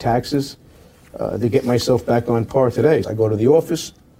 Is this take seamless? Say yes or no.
no